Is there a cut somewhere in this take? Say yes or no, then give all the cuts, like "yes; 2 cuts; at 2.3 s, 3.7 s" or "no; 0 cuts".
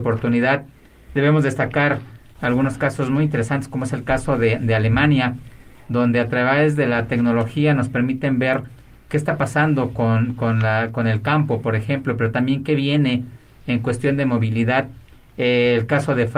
no; 0 cuts